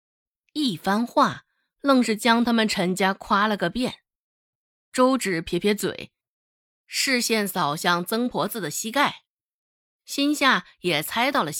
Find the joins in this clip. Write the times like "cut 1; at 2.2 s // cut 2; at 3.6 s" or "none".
none